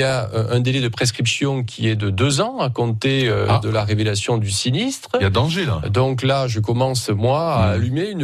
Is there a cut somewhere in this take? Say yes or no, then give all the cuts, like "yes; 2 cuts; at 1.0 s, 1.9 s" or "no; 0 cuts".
no; 0 cuts